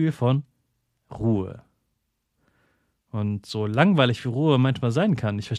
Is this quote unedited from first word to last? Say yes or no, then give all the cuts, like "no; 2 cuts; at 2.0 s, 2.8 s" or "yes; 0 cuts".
yes; 0 cuts